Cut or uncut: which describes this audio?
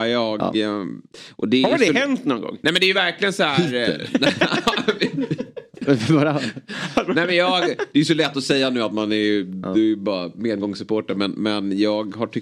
uncut